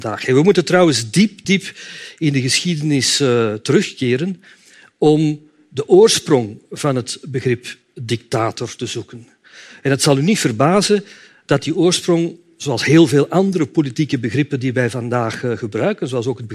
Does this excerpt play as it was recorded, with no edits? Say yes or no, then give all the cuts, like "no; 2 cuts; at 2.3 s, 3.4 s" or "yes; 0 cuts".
no; 1 cut; at 1.4 s